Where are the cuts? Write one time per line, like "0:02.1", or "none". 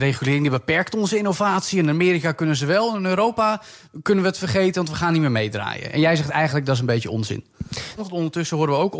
0:08.0